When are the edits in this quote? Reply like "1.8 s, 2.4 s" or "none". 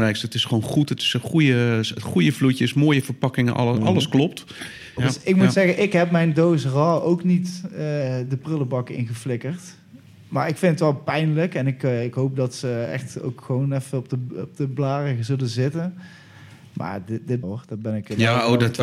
5.0 s, 17.4 s

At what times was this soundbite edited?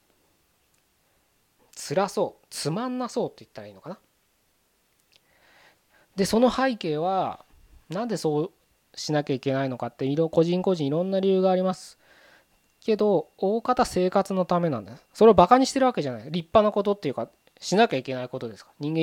1.6 s, 15.1 s

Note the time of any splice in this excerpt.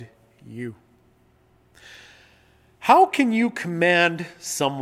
none

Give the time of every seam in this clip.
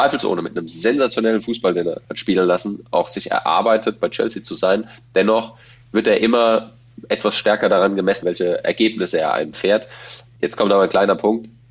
2.0 s, 8.2 s, 10.3 s

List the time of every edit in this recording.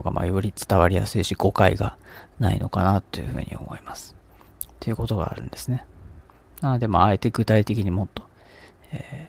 4.6 s

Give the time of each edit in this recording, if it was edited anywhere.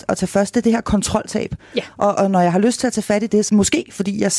2.1 s, 3.5 s

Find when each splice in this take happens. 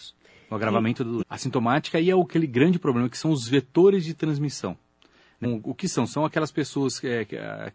1.2 s, 5.4 s

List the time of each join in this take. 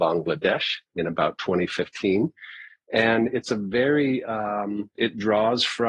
5.0 s

